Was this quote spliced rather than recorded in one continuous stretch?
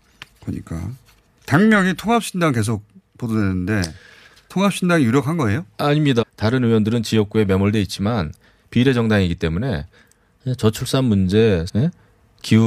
yes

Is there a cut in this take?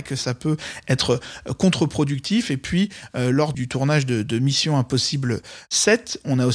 yes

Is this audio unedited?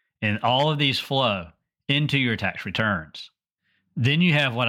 yes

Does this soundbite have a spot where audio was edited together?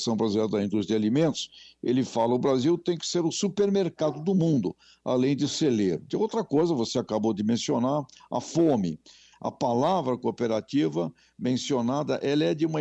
yes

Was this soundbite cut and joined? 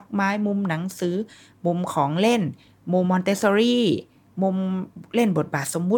yes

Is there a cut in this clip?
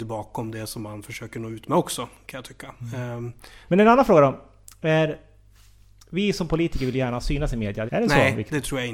yes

